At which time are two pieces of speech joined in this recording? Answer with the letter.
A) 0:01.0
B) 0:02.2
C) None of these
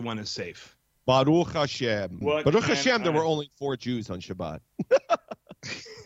B